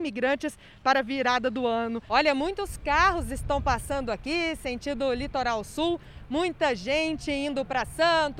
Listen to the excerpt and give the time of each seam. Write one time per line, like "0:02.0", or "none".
0:02.1